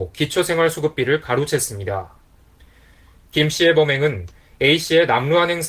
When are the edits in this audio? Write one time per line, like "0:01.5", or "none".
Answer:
none